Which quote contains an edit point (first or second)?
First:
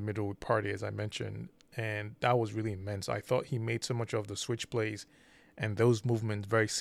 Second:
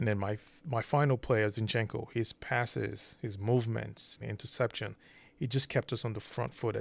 second